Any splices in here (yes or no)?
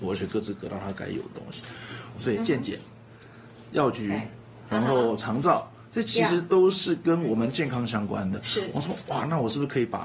yes